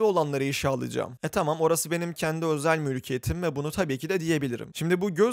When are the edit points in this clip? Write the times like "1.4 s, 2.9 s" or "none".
none